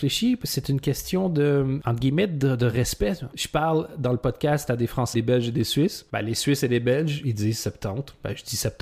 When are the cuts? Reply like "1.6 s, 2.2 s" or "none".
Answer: 5.1 s